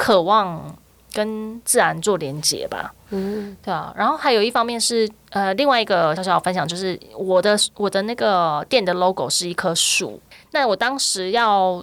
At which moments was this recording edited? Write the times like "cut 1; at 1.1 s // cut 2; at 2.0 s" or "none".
cut 1; at 6.2 s